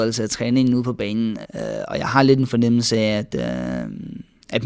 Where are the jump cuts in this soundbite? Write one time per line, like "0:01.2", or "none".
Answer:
0:01.4